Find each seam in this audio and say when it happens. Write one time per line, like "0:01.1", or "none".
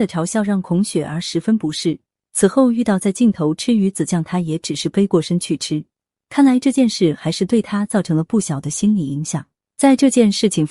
none